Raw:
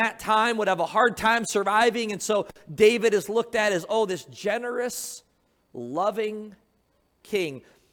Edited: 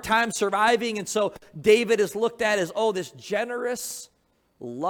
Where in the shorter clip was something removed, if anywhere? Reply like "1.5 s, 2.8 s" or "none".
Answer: none